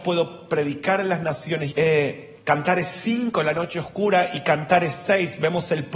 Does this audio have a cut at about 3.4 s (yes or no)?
no